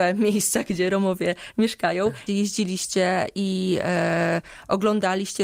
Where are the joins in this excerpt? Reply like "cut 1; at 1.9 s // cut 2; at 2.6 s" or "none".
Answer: cut 1; at 2.3 s